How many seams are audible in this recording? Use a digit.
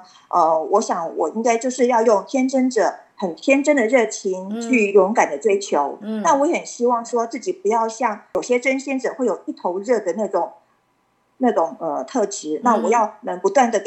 0